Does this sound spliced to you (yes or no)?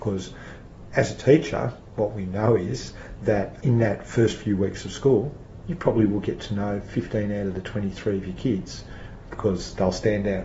yes